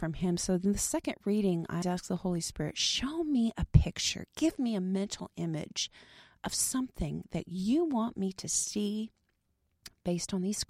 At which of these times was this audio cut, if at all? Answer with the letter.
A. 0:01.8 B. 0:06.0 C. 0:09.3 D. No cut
A